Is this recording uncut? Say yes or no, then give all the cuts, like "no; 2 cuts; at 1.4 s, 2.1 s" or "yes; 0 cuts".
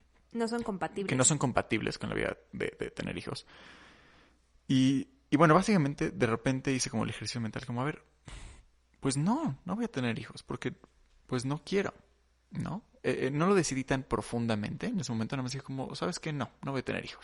yes; 0 cuts